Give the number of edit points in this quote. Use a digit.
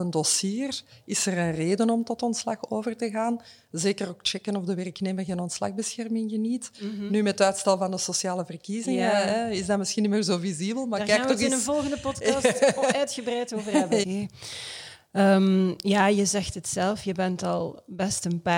1